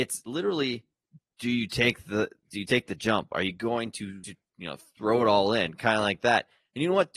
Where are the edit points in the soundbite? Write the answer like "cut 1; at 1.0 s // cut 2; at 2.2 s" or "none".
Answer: none